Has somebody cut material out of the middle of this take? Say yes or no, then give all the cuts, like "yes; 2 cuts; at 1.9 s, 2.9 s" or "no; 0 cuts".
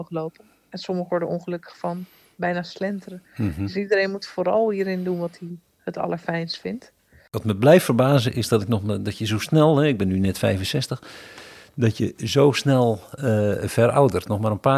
no; 0 cuts